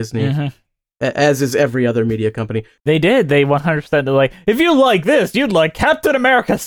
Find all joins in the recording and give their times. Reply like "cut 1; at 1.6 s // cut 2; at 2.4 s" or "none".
cut 1; at 2.8 s